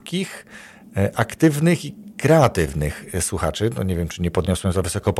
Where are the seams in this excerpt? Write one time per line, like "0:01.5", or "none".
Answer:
none